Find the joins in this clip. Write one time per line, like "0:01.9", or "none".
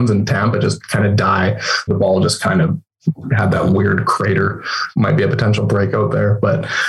0:01.9
0:04.9